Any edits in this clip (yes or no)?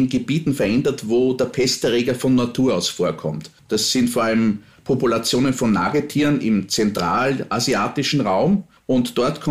no